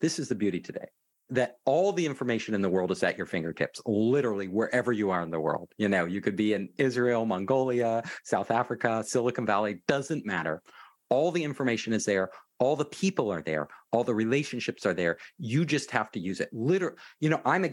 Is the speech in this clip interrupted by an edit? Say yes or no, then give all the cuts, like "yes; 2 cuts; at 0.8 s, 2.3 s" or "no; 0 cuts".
no; 0 cuts